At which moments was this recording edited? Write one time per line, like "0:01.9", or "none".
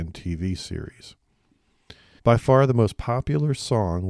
0:02.2